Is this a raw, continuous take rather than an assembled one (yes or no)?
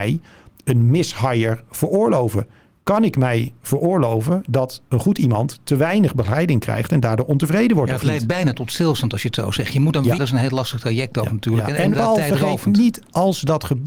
no